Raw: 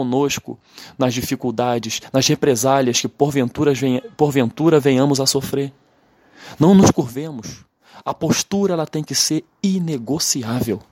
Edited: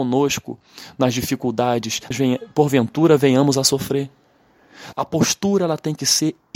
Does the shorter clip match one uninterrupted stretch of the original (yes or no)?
no